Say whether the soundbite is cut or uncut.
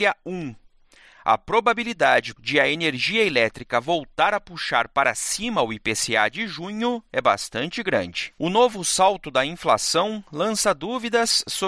cut